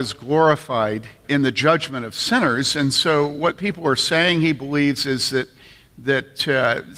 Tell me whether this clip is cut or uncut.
cut